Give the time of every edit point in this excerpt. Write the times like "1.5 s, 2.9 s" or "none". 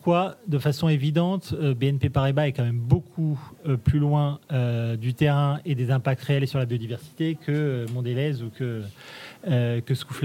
none